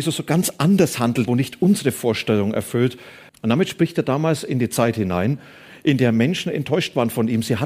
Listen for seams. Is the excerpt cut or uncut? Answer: cut